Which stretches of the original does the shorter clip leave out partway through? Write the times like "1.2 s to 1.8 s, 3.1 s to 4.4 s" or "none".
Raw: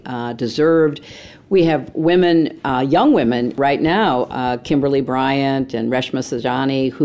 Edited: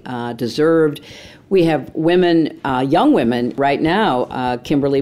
none